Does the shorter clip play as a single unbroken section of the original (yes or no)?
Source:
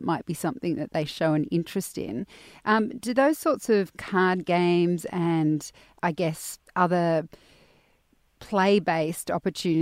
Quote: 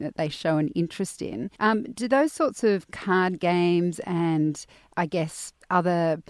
no